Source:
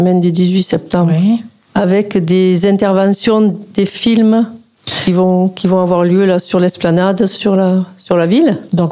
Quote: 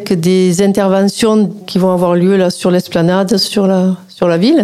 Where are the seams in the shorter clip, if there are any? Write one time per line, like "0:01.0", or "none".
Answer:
0:01.6